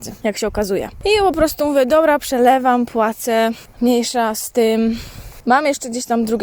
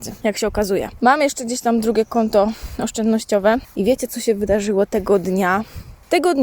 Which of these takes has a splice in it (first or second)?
second